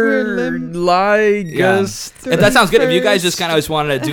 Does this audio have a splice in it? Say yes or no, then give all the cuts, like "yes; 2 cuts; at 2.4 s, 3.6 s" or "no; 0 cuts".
no; 0 cuts